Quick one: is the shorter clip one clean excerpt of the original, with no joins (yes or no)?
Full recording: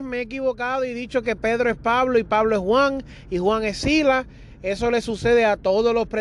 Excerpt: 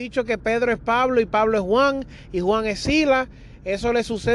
yes